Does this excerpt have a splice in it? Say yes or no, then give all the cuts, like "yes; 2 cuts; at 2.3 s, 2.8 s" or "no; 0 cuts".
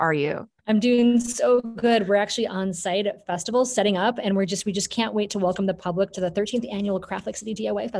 no; 0 cuts